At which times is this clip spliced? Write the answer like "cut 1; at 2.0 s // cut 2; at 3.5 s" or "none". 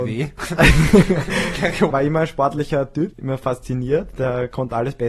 cut 1; at 1.9 s // cut 2; at 3.1 s

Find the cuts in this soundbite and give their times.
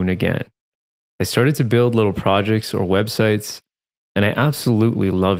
none

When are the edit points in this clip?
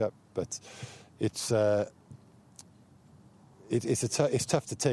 none

